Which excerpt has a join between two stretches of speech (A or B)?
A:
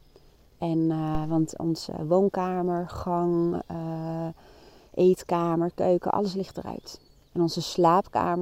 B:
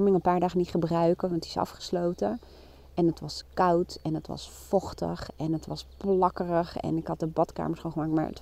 A